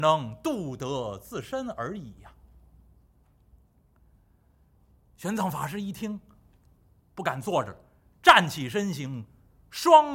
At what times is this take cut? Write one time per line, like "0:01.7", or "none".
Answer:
none